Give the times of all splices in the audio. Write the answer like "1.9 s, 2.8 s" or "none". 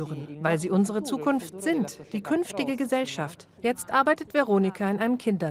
3.6 s